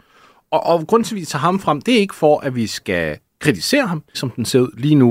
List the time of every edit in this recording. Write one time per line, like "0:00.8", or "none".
0:04.1